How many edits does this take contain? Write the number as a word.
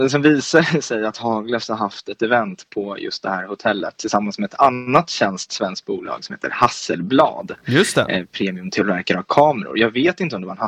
zero